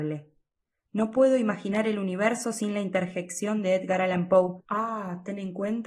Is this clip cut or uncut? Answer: uncut